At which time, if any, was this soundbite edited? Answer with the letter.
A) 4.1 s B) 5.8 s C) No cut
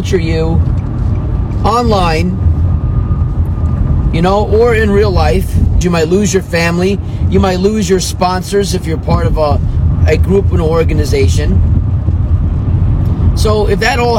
B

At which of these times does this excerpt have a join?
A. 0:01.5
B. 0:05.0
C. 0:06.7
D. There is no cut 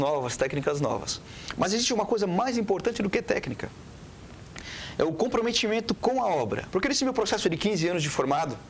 C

